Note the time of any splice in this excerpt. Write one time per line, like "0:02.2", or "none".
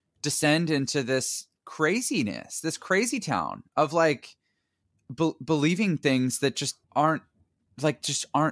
0:06.8